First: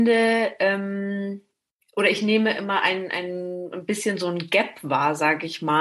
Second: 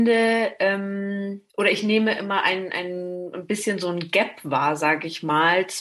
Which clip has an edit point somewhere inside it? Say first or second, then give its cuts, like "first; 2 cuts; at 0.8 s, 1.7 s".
second; 1 cut; at 1.5 s